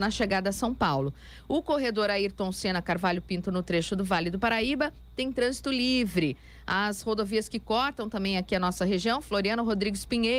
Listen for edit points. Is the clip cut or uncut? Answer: uncut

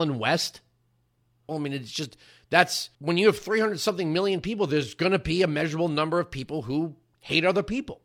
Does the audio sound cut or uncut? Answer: cut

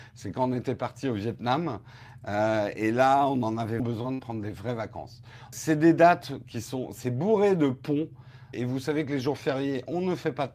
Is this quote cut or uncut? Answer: cut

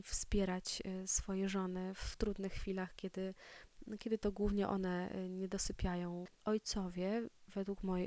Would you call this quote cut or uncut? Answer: cut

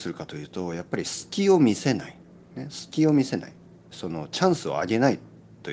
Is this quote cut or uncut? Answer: cut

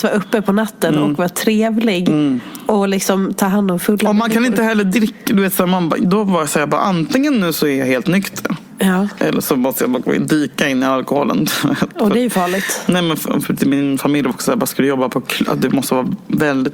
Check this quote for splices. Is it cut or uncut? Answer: uncut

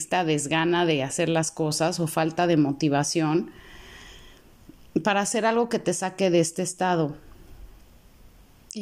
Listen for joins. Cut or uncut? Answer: uncut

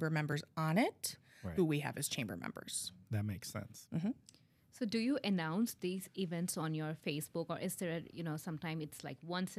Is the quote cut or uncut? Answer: cut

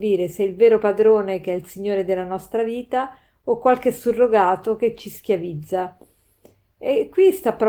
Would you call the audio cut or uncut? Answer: uncut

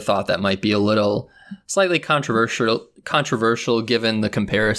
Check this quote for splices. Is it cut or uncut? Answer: uncut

